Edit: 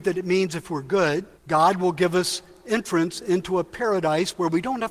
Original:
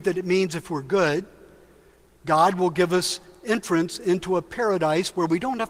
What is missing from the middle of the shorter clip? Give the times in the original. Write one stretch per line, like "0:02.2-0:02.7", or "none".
0:01.4-0:02.1